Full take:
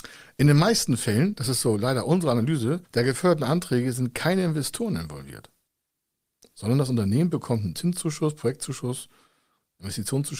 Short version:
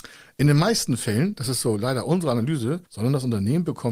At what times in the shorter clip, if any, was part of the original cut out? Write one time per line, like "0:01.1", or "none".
0:02.9